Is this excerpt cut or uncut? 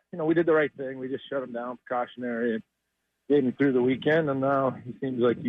uncut